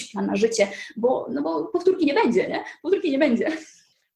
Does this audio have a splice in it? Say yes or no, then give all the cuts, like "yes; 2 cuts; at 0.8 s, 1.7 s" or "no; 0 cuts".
no; 0 cuts